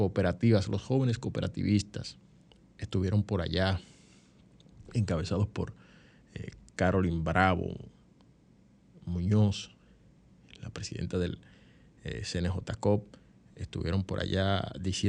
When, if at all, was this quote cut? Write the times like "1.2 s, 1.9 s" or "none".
none